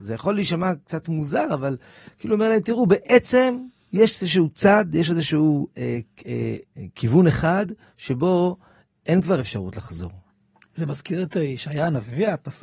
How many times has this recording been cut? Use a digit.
2